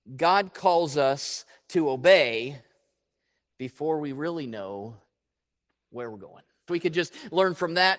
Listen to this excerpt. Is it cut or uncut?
cut